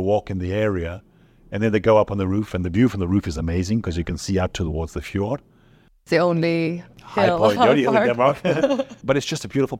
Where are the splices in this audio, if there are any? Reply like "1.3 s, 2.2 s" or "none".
7.6 s